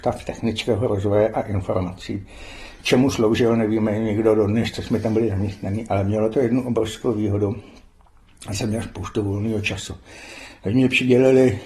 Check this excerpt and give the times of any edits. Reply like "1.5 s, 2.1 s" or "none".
none